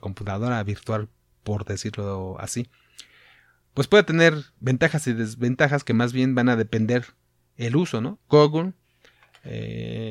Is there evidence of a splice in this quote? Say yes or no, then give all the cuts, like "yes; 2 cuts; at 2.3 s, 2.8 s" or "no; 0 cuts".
yes; 1 cut; at 8.2 s